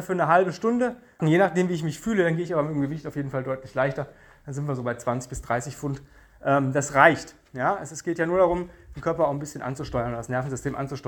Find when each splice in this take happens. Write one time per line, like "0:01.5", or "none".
0:01.2

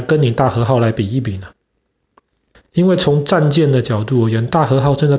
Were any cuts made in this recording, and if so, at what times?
0:02.5

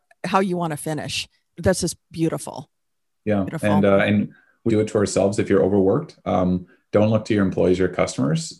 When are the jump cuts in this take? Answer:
0:04.7

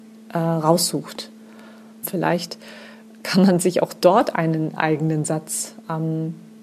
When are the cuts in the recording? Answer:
0:02.0

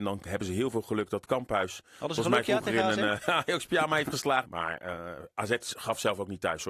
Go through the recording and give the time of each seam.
0:04.4

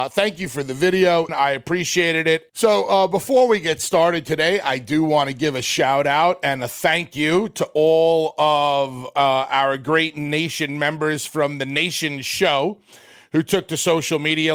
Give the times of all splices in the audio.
0:01.3
0:02.5

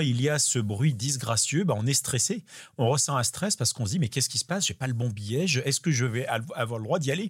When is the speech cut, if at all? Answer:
none

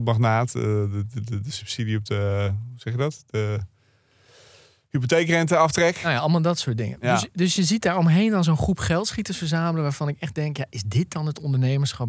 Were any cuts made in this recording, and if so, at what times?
none

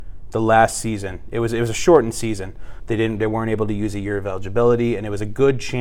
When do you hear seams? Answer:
0:02.8

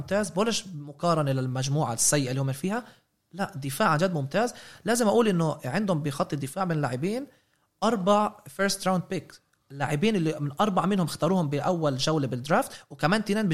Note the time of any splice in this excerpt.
none

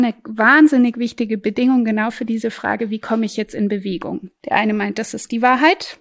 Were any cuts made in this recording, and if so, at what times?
0:04.3

